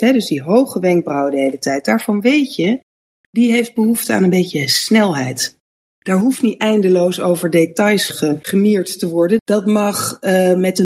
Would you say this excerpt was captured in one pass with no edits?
no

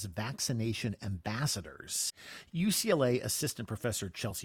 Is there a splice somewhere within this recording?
no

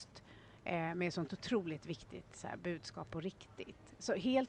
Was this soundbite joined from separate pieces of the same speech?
no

